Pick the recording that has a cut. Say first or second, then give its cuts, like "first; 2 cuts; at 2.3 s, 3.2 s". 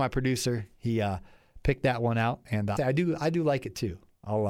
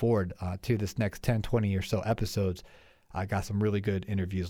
first; 1 cut; at 2.8 s